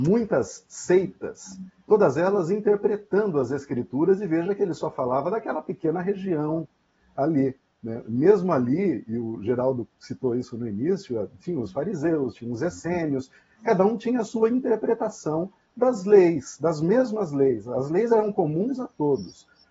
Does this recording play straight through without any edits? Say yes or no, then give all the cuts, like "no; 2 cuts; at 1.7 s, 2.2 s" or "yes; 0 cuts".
no; 1 cut; at 12.3 s